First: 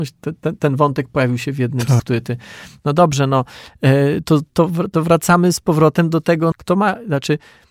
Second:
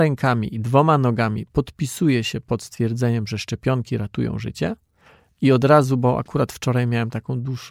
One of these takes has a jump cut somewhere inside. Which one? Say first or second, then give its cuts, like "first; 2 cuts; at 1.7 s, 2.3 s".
first; 2 cuts; at 2.0 s, 6.5 s